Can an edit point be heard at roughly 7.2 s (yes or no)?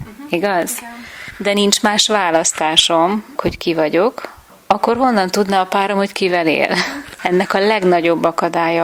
yes